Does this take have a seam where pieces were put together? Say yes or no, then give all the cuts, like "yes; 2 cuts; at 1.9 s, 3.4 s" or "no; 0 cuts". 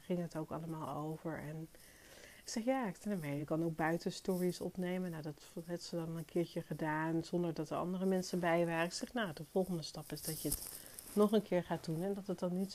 no; 0 cuts